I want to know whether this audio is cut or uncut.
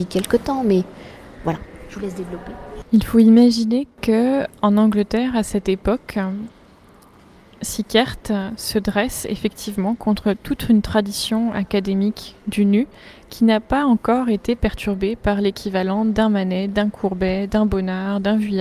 uncut